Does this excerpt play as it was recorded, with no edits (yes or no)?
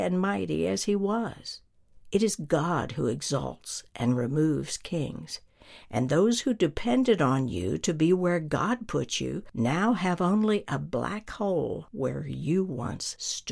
no